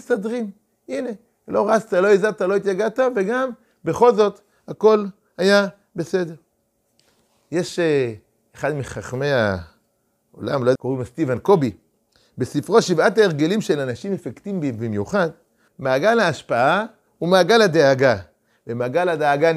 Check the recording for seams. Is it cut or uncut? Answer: cut